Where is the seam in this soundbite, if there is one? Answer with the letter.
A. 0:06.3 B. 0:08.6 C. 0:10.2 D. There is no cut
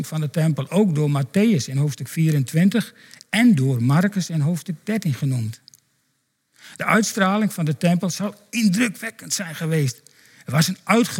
D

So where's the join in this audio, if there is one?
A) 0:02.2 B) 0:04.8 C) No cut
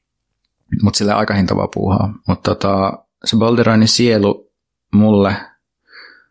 A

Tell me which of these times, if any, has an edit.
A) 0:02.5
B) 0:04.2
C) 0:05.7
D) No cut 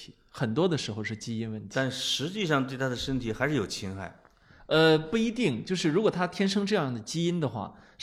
D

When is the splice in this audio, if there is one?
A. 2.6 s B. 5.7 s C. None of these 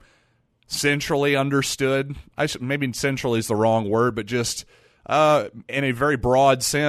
B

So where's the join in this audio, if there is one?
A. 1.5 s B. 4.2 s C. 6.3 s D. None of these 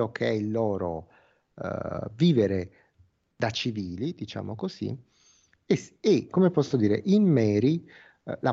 C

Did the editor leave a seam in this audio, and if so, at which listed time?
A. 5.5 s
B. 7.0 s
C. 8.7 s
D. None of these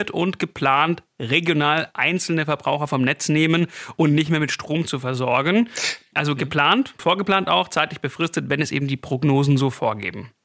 B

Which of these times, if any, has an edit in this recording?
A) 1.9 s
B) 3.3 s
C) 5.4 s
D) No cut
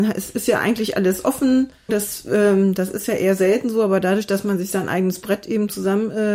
A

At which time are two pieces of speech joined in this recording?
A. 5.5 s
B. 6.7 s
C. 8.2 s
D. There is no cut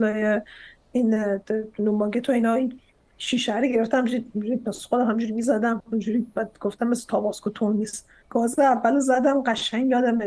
C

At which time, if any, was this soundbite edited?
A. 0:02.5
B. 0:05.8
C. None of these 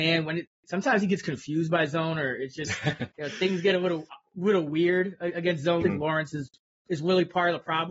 B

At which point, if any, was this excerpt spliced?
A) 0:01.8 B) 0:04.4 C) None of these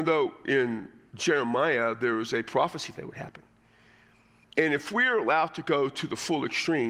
B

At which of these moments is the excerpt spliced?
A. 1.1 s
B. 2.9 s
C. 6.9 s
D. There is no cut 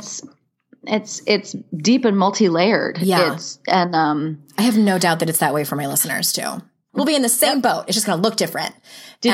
C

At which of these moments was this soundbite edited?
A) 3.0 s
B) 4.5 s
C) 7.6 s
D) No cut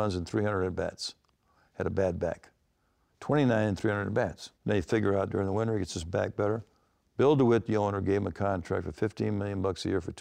B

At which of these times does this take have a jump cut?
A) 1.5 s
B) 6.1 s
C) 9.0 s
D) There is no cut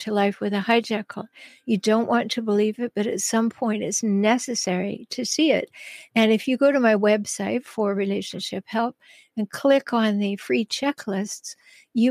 D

